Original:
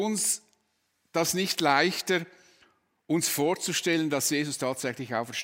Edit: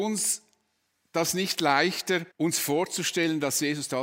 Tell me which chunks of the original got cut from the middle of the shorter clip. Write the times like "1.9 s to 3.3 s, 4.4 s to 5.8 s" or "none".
2.3 s to 3.0 s